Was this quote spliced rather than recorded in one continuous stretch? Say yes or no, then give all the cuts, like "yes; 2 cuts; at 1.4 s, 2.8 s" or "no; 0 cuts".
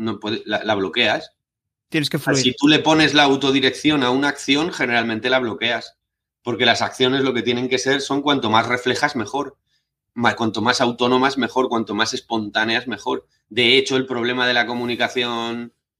no; 0 cuts